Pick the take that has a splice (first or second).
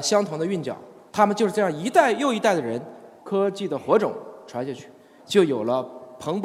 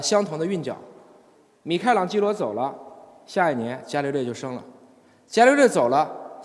first